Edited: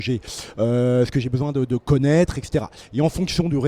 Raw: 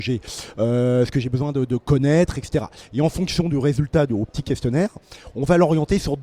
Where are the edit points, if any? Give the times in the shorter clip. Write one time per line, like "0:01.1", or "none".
none